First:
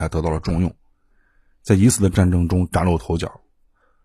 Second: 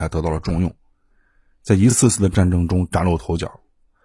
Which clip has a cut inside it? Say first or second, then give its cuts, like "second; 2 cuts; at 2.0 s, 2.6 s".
first; 1 cut; at 1.9 s